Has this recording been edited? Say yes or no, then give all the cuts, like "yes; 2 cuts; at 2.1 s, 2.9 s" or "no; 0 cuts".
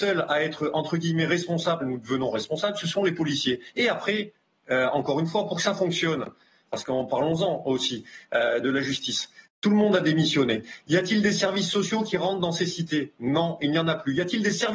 yes; 3 cuts; at 1.8 s, 6.7 s, 9.5 s